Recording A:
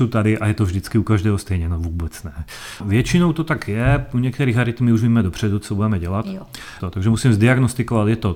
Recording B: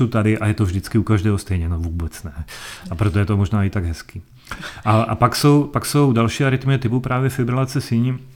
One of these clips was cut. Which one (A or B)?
A